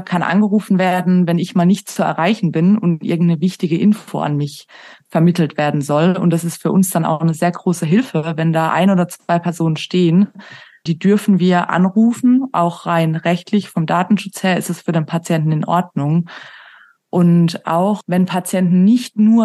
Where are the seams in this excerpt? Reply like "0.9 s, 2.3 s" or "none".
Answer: 10.9 s